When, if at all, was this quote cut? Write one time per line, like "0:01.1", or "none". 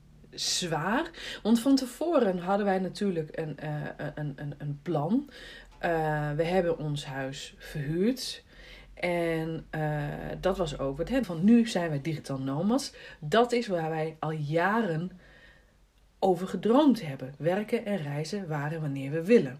0:11.2
0:17.4